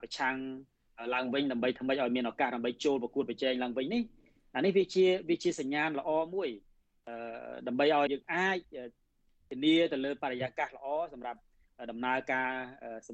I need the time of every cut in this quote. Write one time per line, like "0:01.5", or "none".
0:08.1